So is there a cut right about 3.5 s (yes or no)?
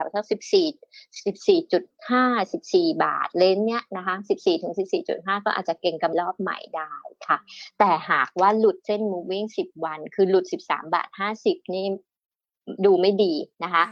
no